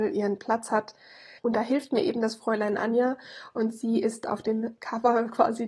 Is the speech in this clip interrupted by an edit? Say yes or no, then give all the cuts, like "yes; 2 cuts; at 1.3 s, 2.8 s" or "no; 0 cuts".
yes; 2 cuts; at 1.4 s, 4.8 s